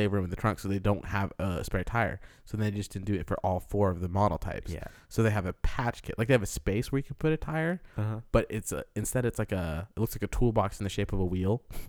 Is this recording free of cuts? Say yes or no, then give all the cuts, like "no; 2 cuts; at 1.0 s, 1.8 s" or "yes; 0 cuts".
yes; 0 cuts